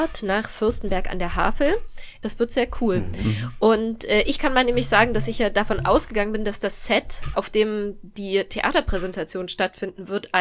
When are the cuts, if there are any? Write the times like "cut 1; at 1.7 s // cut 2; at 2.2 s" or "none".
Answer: cut 1; at 2.2 s // cut 2; at 7.3 s